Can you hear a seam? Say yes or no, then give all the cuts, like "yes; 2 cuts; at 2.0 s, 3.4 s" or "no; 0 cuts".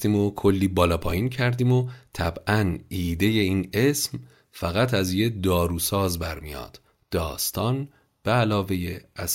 no; 0 cuts